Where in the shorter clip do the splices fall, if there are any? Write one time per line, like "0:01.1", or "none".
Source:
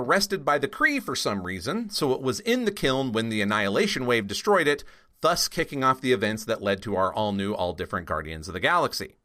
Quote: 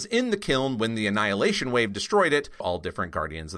0:02.6

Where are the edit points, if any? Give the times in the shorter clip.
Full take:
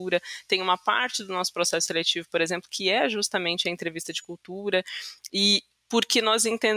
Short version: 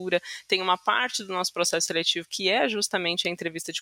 0:02.3

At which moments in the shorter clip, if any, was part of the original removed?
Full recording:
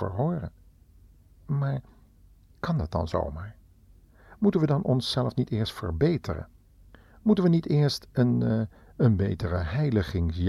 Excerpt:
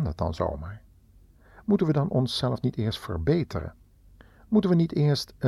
none

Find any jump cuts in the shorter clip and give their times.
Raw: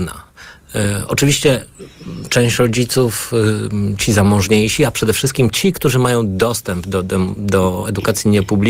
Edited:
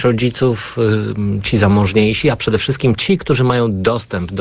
none

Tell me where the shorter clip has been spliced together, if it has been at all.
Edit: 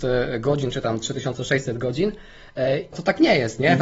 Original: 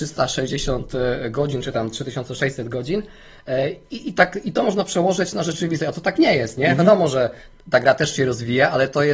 0:02.9

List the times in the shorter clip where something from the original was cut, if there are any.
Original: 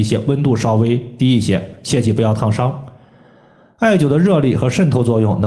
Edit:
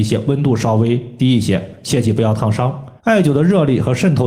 0:03.0

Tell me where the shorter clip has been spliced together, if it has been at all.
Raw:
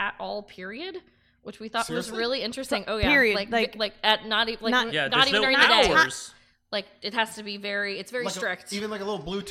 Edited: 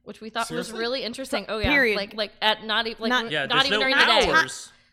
0:02.1

